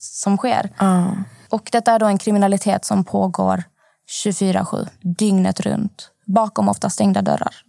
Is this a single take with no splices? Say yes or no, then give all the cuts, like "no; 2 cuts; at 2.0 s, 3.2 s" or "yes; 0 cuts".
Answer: no; 1 cut; at 1.5 s